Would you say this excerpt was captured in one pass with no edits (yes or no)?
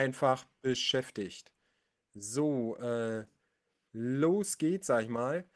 yes